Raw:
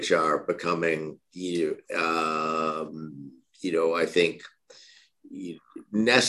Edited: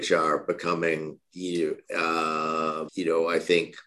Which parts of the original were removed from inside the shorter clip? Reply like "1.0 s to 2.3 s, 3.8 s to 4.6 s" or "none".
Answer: 2.9 s to 3.5 s

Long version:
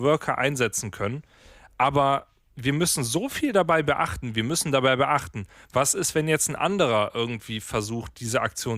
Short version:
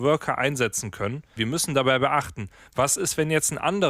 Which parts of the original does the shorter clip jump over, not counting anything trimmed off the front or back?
1.4 s to 4.3 s

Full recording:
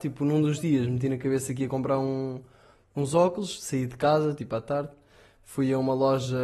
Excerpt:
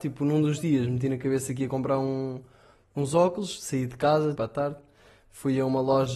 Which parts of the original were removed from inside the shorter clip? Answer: 4.4 s to 4.5 s

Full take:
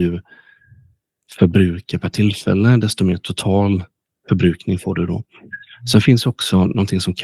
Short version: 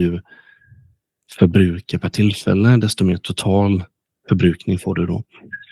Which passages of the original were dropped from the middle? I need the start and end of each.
none

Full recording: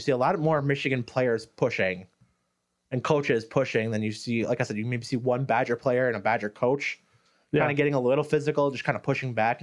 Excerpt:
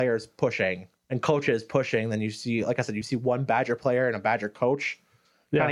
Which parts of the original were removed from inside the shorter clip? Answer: 2.2 s to 2.8 s, 4.8 s to 5.0 s

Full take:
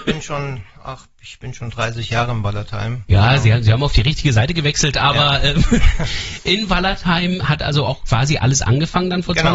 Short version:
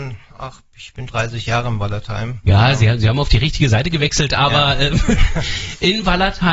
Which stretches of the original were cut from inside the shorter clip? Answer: 1.5 s to 1.7 s

